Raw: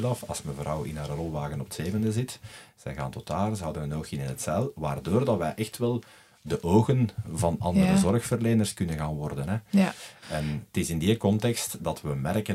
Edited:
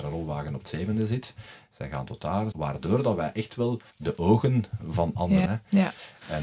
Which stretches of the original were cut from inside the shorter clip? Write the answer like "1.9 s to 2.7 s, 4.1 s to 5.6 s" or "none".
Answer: 3.6 s to 4.7 s, 6.1 s to 6.4 s, 7.9 s to 9.5 s